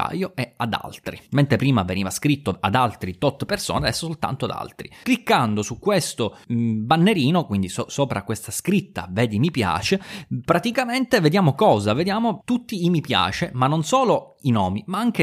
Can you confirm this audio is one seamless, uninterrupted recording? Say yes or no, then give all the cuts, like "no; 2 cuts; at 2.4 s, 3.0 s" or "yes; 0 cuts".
no; 1 cut; at 5.0 s